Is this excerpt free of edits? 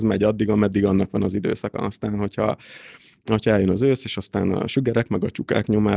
yes; 0 cuts

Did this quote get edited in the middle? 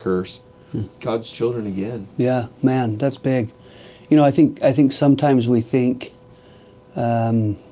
yes; 1 cut; at 1.0 s

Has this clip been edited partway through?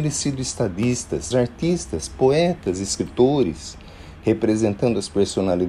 yes; 1 cut; at 1.3 s

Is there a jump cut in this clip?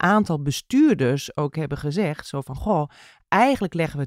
no; 0 cuts

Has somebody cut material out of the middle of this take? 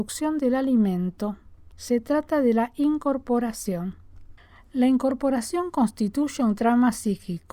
no; 0 cuts

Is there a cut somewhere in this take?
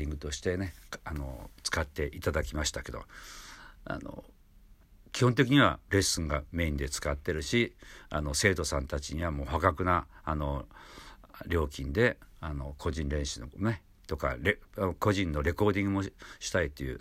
no; 0 cuts

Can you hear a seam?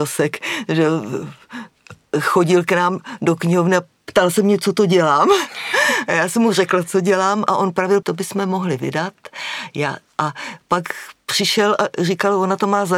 yes; 1 cut; at 8.0 s

